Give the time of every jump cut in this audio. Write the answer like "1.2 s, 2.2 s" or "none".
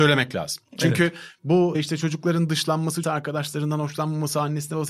3.0 s